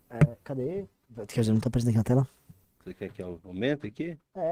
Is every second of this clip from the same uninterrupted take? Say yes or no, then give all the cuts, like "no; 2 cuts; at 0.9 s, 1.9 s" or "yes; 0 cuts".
yes; 0 cuts